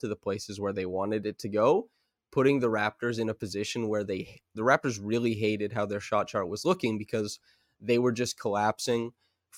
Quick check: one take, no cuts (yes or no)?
yes